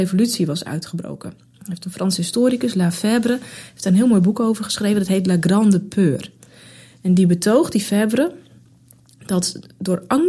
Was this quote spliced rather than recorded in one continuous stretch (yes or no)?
no